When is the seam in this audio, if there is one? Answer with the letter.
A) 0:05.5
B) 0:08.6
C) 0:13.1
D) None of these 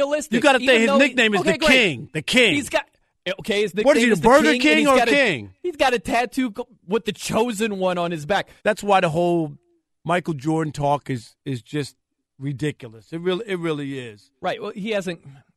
B